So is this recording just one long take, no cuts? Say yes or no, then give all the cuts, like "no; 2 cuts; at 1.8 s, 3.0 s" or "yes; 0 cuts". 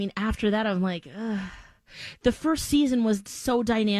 yes; 0 cuts